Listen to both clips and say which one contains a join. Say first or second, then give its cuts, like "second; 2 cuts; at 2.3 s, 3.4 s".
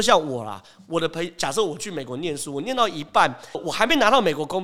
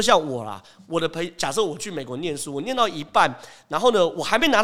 first; 1 cut; at 3.5 s